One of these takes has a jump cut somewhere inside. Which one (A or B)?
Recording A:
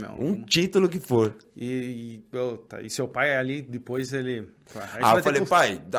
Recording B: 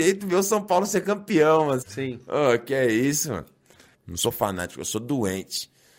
B